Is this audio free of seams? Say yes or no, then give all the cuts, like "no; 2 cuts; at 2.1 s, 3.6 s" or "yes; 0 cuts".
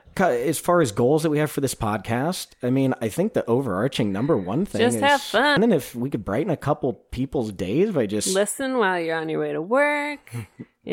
no; 1 cut; at 5.6 s